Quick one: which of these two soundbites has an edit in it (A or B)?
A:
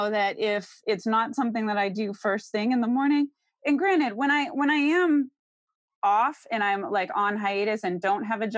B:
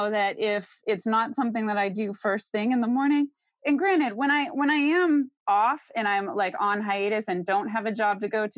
B